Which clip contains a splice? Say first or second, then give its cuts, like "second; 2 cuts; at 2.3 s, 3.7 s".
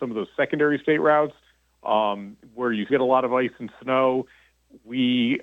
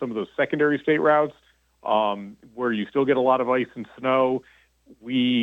first; 1 cut; at 2.9 s